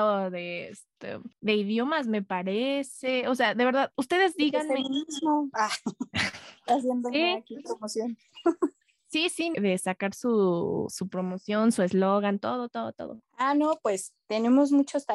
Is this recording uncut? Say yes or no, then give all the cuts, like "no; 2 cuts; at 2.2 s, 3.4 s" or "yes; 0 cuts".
no; 1 cut; at 9.5 s